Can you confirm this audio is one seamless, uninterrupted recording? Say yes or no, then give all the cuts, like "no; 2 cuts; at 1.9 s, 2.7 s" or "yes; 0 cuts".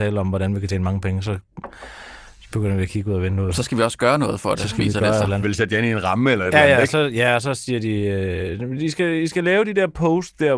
no; 1 cut; at 5.4 s